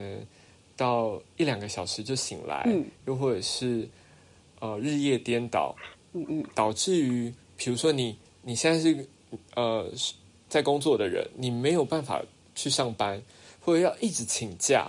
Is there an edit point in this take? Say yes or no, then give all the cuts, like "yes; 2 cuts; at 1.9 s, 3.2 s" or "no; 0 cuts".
no; 0 cuts